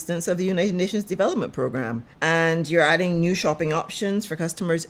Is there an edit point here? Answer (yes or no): yes